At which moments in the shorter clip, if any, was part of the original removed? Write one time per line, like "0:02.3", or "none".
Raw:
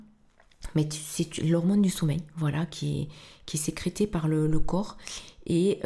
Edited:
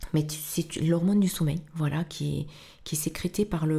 none